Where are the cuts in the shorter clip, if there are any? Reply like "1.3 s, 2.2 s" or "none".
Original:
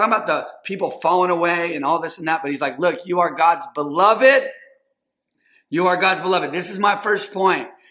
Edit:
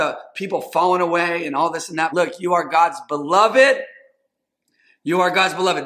2.1 s